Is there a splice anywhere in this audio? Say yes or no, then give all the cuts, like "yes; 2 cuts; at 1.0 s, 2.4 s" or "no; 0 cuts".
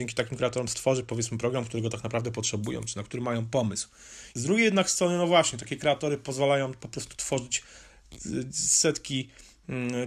yes; 1 cut; at 4.3 s